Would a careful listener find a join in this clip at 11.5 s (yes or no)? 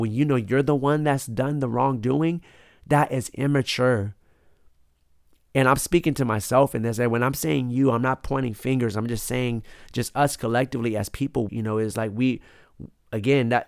yes